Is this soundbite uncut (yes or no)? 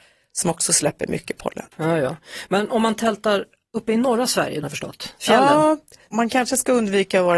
no